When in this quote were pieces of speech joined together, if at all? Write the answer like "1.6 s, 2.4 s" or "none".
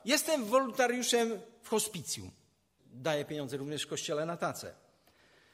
2.8 s